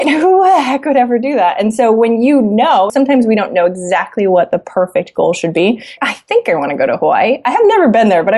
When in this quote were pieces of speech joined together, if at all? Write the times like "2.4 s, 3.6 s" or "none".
2.9 s, 6.0 s